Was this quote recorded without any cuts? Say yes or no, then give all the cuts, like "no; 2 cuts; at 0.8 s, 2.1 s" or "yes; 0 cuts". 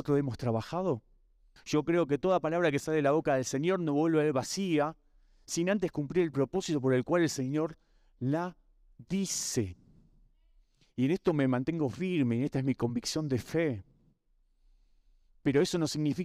no; 1 cut; at 1.6 s